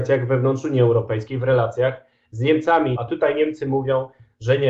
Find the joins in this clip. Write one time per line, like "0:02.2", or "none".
0:03.0